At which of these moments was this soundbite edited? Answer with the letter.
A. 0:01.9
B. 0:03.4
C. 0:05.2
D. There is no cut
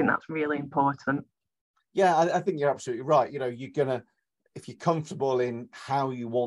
D